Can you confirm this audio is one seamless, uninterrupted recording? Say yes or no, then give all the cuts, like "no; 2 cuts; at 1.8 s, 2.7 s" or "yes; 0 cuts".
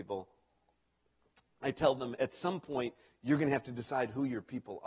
yes; 0 cuts